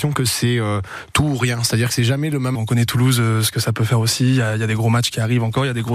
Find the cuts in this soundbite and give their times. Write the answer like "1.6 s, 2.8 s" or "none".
2.5 s